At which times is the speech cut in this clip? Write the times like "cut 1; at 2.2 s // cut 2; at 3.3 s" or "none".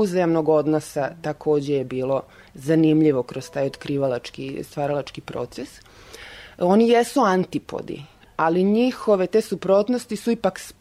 none